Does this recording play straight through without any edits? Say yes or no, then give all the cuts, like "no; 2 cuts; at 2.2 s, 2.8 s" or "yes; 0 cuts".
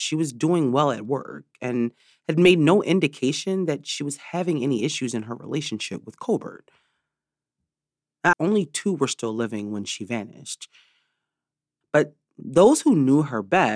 no; 2 cuts; at 8.3 s, 11.8 s